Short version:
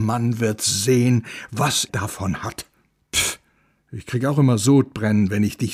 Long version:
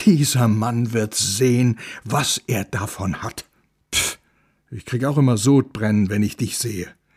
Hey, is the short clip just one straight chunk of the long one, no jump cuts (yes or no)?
no